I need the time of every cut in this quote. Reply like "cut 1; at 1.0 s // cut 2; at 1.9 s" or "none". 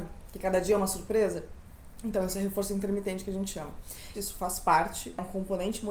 cut 1; at 4.1 s